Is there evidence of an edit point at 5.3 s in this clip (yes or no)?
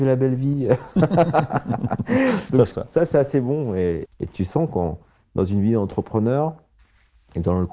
no